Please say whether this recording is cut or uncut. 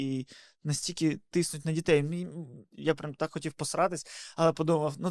cut